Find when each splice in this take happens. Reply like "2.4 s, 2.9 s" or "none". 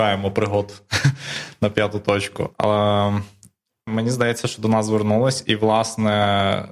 3.9 s